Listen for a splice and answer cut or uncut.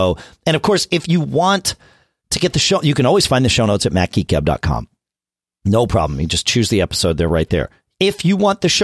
uncut